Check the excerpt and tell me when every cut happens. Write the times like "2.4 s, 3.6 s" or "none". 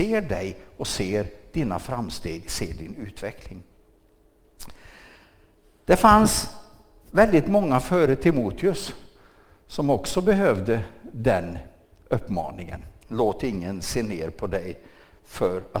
none